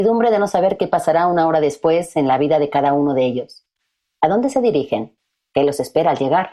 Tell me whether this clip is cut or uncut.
uncut